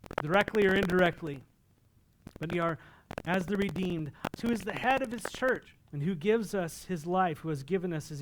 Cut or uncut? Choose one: cut